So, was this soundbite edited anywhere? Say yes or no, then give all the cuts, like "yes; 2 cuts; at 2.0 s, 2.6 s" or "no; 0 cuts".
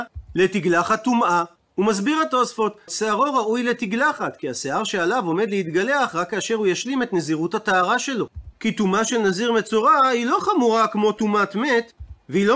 yes; 2 cuts; at 2.9 s, 8.5 s